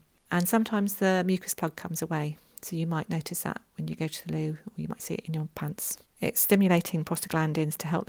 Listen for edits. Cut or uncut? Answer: cut